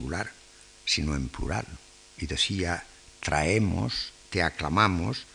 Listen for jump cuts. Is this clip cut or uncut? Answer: uncut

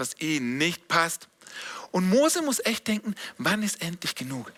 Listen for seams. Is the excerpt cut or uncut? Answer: uncut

